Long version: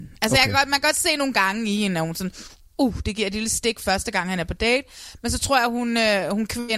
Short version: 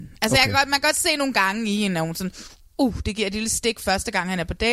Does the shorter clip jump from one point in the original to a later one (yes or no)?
no